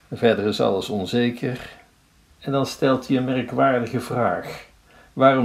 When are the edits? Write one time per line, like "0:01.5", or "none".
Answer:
0:02.3